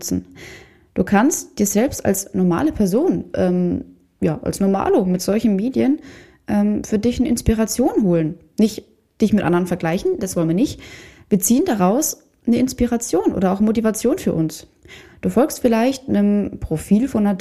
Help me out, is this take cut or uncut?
cut